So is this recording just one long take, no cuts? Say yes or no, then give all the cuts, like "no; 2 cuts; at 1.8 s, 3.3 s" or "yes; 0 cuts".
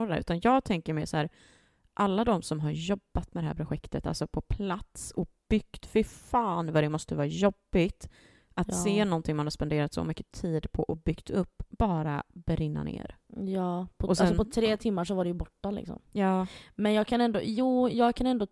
yes; 0 cuts